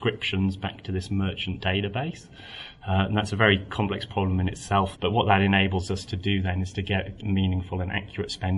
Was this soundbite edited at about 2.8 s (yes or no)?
no